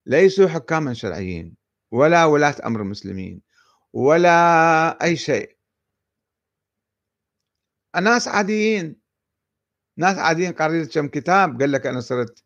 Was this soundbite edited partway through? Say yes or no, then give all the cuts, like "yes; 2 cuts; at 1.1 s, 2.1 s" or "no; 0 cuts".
no; 0 cuts